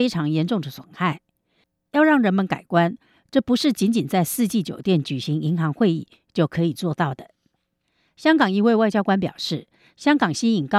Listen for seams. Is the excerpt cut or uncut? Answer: uncut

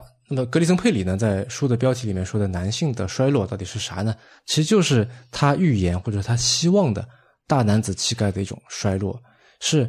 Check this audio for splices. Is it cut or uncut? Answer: uncut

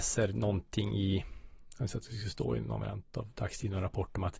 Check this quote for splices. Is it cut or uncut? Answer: uncut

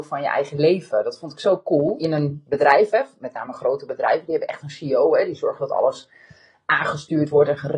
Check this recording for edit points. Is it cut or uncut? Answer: cut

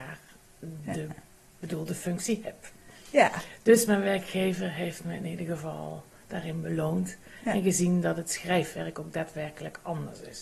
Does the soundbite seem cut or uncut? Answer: uncut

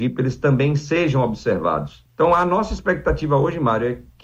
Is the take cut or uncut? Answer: cut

